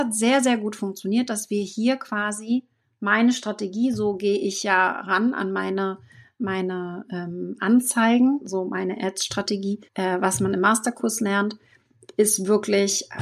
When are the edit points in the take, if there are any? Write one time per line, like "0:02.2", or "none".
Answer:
0:09.9